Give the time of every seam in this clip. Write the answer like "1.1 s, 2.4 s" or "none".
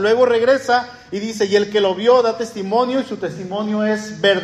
none